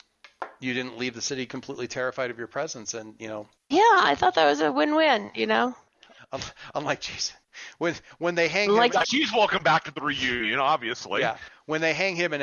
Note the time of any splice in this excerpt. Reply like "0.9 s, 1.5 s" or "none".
9.0 s